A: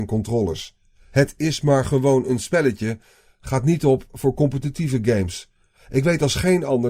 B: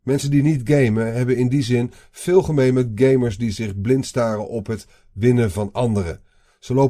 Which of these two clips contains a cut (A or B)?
A